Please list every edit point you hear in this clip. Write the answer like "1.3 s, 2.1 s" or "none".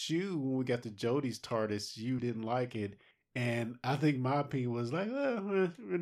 2.2 s